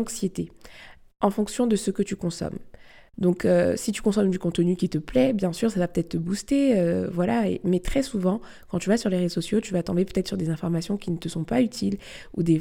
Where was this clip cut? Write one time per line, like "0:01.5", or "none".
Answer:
none